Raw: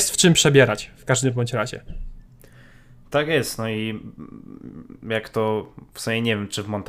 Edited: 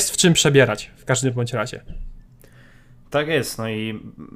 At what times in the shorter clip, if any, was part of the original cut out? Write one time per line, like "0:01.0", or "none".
none